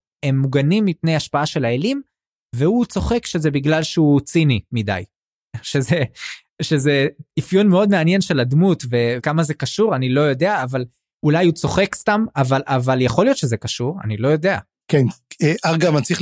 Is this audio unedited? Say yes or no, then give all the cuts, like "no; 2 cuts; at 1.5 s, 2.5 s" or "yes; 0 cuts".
no; 1 cut; at 14.7 s